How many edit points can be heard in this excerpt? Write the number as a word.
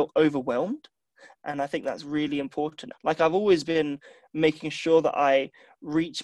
two